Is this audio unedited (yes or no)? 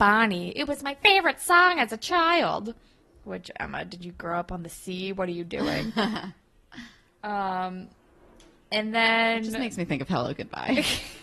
no